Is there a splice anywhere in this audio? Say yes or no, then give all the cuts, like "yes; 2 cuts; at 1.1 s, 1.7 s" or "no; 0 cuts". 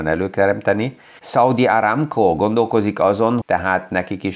yes; 2 cuts; at 1.2 s, 3.4 s